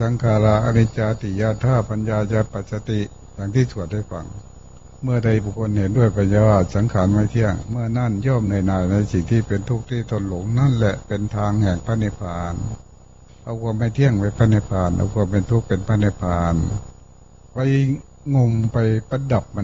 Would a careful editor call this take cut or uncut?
uncut